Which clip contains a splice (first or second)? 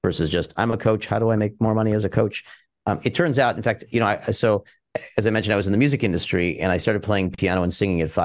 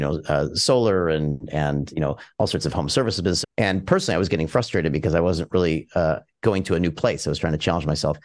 second